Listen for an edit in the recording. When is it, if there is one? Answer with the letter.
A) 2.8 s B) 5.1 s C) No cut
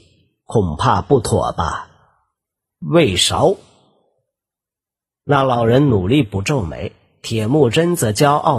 A